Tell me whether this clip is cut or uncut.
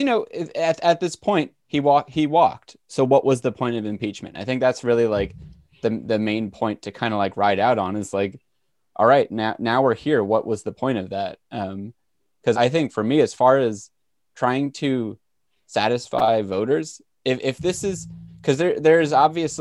cut